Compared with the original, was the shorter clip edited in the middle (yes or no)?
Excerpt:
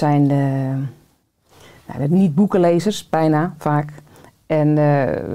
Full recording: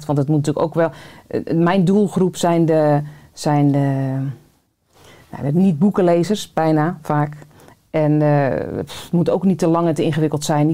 no